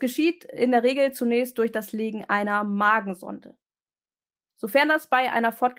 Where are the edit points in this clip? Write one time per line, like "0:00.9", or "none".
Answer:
none